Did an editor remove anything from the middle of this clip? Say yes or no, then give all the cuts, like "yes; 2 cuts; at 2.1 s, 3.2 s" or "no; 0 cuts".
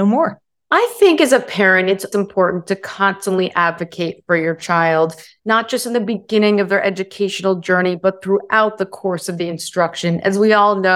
yes; 1 cut; at 2.1 s